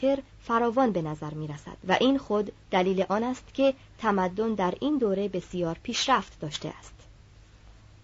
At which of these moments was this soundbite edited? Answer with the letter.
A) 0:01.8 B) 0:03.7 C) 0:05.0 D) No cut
A